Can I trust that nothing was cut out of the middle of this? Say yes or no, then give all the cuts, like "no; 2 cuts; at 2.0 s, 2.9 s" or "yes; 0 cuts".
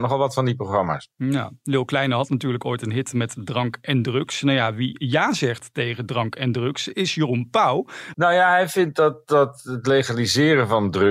no; 1 cut; at 8.1 s